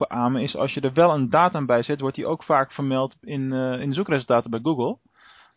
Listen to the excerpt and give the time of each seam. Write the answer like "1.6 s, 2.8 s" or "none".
none